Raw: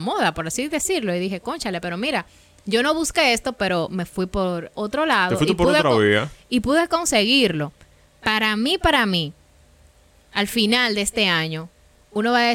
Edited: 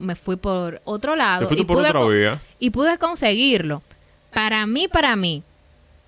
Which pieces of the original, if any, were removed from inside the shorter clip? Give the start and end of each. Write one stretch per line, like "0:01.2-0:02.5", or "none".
none